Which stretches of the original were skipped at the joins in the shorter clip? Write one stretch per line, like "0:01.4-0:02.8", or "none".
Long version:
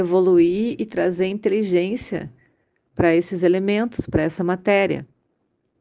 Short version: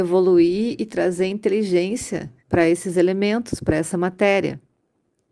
0:02.4-0:02.9